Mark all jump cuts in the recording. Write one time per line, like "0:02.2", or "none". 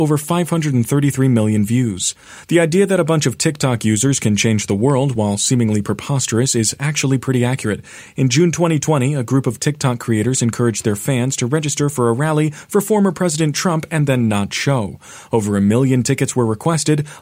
none